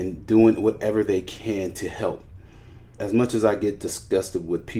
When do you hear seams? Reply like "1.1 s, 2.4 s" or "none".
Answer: 3.0 s

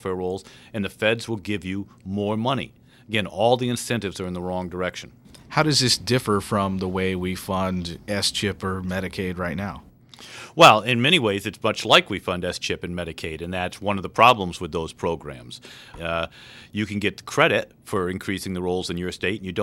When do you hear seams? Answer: 15.9 s

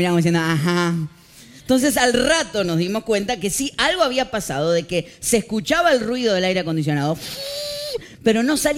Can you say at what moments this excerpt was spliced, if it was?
none

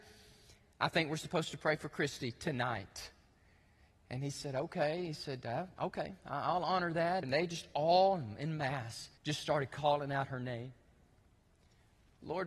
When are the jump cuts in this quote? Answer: 7.2 s, 9.2 s

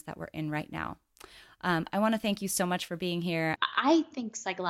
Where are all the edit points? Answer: 3.6 s

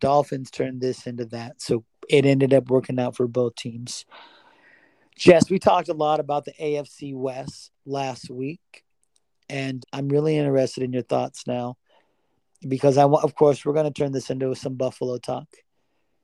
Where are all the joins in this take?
9.8 s

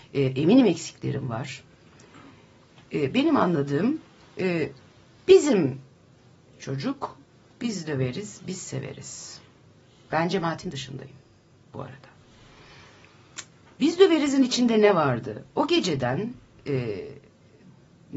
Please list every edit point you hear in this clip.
none

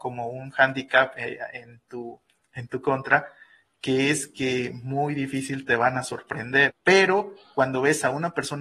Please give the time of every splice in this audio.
6.7 s

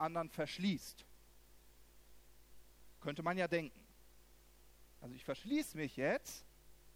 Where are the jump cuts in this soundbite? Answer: none

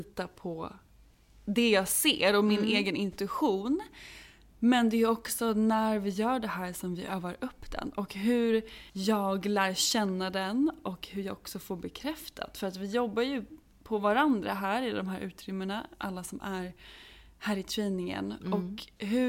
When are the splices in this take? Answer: 8.9 s

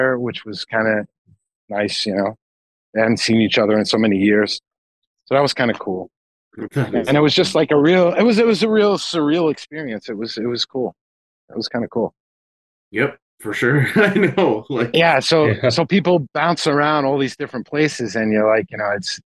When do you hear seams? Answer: 12.8 s

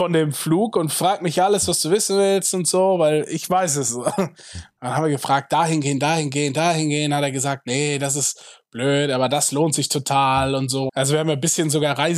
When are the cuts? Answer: 10.9 s

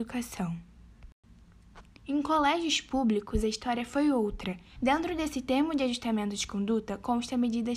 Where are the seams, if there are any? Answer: 2.0 s, 4.8 s

